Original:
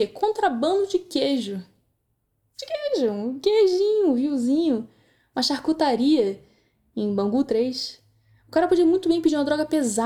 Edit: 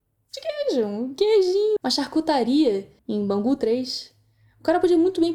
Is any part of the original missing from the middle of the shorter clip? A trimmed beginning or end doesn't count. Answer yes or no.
yes